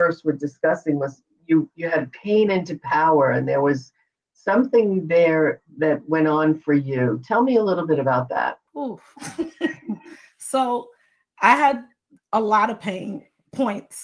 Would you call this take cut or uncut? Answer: cut